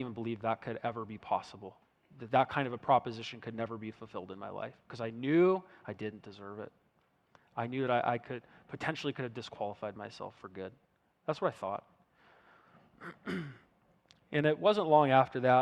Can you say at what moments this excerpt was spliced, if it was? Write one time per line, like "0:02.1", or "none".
none